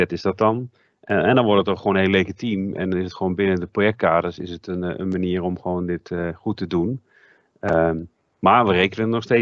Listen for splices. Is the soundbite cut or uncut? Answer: uncut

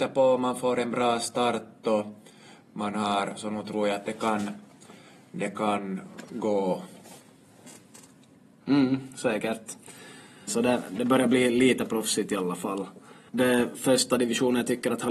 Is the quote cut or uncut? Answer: cut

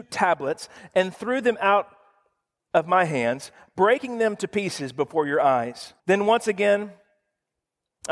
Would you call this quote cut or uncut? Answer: cut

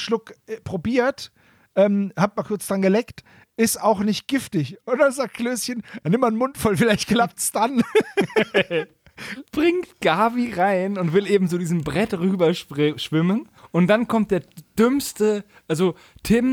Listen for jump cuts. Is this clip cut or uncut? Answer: cut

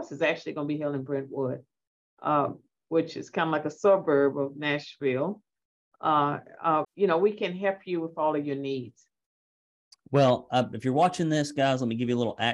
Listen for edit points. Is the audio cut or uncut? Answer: cut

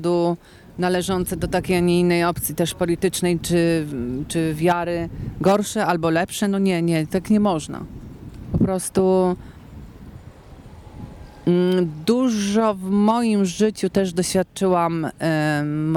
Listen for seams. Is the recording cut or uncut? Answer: uncut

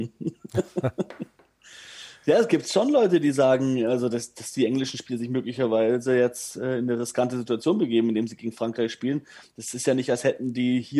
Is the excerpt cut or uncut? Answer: uncut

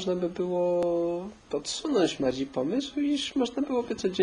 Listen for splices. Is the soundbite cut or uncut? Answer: cut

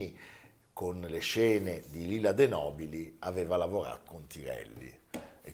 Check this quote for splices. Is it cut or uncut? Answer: cut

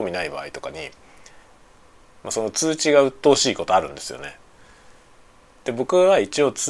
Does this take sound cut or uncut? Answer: uncut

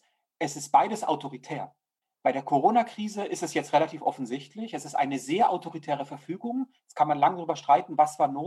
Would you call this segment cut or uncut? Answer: uncut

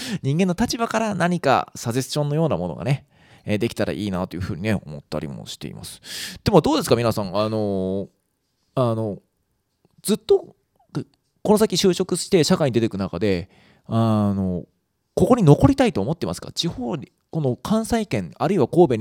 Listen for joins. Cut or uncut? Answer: uncut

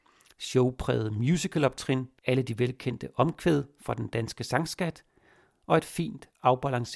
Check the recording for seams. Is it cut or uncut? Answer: cut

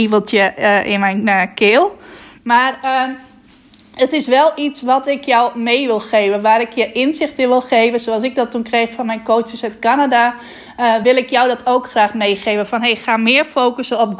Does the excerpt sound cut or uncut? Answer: uncut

